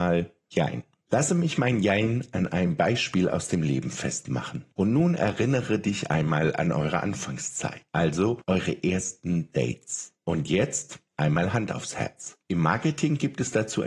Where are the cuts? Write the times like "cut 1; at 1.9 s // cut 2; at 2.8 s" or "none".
cut 1; at 4.7 s // cut 2; at 12.4 s